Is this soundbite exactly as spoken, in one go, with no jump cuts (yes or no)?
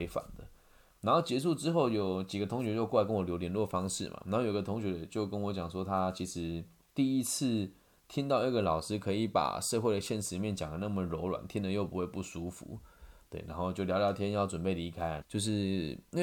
no